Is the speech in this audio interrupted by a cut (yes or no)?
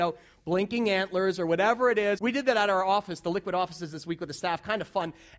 yes